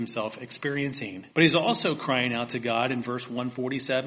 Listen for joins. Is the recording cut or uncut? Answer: cut